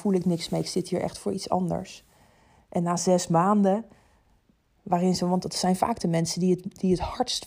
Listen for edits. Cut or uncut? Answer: uncut